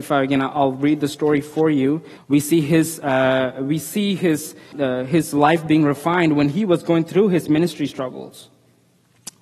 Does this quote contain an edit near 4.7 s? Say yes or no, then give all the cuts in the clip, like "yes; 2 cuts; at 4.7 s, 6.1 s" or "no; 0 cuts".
yes; 2 cuts; at 2.2 s, 4.7 s